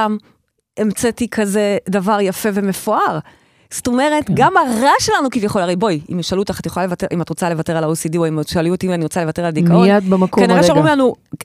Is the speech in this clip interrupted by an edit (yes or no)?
no